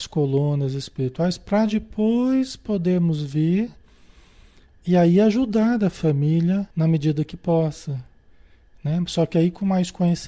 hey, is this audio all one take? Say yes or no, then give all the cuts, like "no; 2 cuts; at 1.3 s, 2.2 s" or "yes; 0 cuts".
no; 1 cut; at 6.7 s